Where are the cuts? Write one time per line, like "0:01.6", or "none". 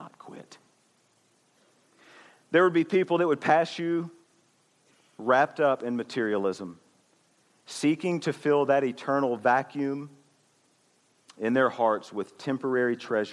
none